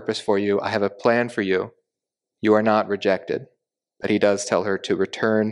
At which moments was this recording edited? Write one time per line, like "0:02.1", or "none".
none